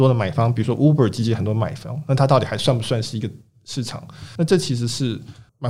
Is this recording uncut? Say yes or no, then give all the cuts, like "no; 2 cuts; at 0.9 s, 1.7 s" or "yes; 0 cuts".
yes; 0 cuts